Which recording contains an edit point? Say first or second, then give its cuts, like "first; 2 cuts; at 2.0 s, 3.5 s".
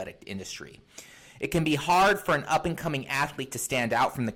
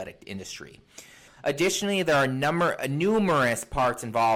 second; 1 cut; at 1.3 s